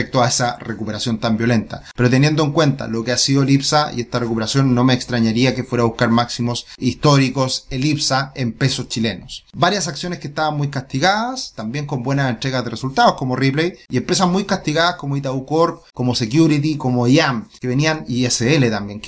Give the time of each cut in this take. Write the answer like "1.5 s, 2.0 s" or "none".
9.5 s

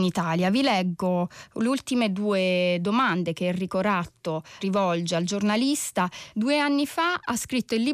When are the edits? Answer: 4.6 s, 6.3 s

